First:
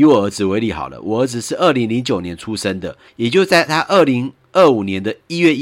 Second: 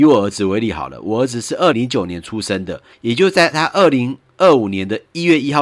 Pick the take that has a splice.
second; 1 cut; at 1.7 s

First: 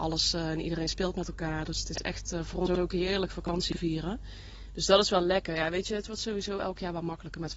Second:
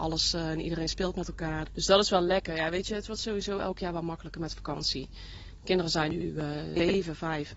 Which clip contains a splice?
second; 1 cut; at 1.7 s

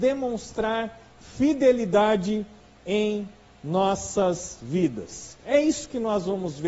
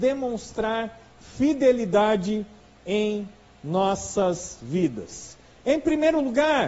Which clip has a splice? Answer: first; 1 cut; at 5.4 s

